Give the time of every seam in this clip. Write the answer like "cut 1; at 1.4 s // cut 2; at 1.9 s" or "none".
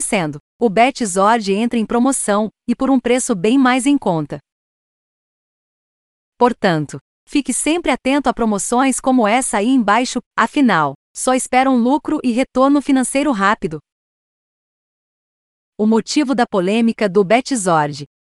cut 1; at 7.1 s // cut 2; at 10.2 s